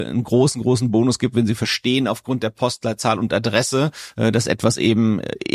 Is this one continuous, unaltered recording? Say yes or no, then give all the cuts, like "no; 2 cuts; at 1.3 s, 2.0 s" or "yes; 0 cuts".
yes; 0 cuts